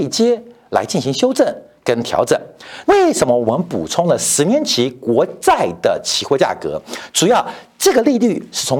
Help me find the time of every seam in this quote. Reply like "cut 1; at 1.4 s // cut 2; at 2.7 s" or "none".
cut 1; at 2.8 s